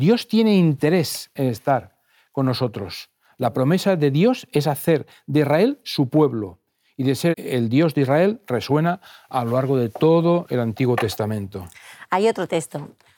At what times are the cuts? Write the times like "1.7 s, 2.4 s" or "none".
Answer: 7.3 s